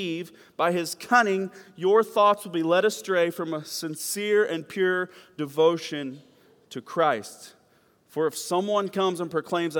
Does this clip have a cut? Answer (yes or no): no